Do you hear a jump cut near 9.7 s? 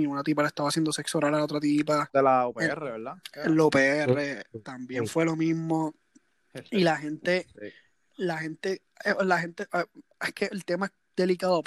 no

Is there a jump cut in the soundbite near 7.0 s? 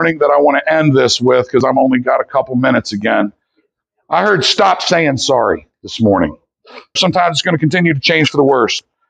yes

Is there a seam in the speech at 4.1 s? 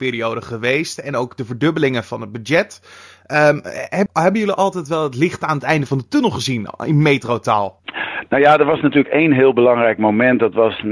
yes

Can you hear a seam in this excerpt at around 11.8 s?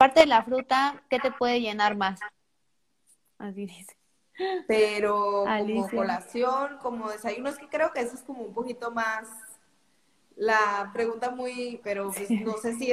yes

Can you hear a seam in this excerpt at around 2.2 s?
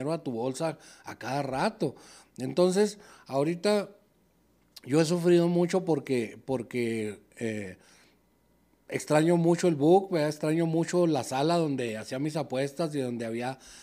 no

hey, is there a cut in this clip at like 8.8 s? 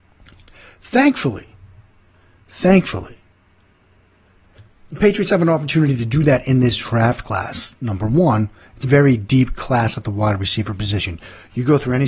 yes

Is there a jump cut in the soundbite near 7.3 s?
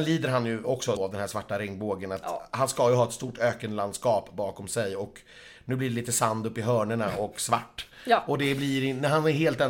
no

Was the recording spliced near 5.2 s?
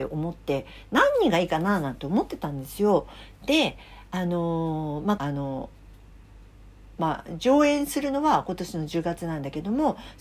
yes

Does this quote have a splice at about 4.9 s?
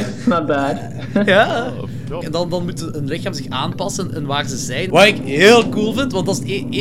yes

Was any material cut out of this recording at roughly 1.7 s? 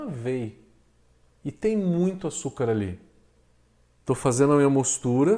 no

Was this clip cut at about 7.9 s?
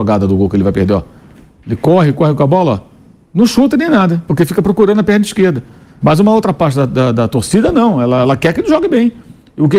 no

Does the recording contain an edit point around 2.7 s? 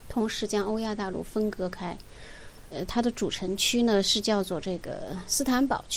yes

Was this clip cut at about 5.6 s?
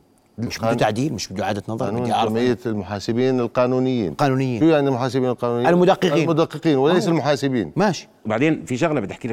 no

